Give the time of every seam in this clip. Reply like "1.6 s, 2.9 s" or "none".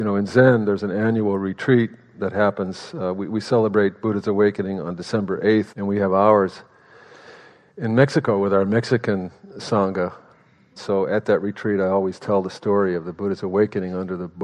5.7 s, 10.8 s